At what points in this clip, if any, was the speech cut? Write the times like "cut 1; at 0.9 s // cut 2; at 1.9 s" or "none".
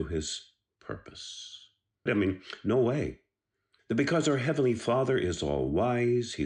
cut 1; at 2.1 s // cut 2; at 3.8 s